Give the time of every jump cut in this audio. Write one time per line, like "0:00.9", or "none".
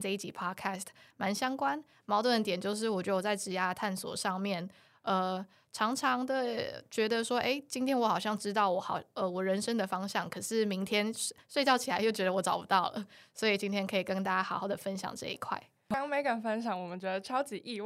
none